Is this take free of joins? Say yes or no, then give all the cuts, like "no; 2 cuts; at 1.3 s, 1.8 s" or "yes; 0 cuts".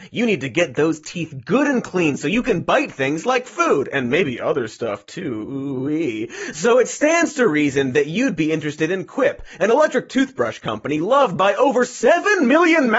yes; 0 cuts